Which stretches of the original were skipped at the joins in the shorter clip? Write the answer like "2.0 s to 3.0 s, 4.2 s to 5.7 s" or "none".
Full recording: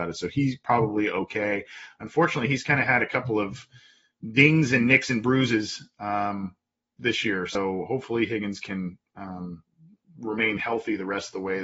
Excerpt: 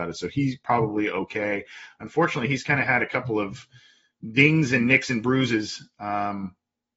none